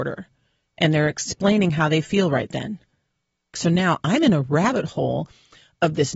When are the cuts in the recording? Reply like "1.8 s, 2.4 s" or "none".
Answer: 3.5 s